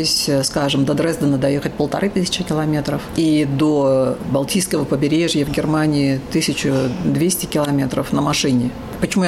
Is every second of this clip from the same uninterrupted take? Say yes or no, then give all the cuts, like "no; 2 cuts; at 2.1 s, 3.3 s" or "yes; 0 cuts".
yes; 0 cuts